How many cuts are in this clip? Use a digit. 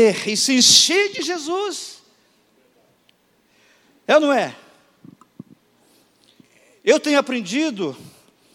0